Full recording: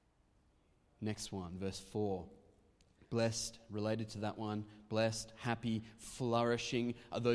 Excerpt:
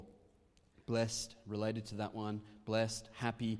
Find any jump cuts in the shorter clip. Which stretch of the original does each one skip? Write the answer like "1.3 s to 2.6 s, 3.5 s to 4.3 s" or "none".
none